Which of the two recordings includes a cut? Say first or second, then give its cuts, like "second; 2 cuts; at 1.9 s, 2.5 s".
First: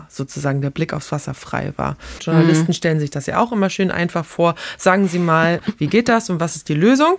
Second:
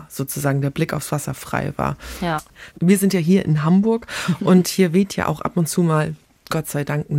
first; 1 cut; at 2.2 s